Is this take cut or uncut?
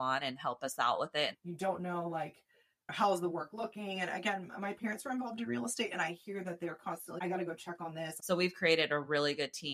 cut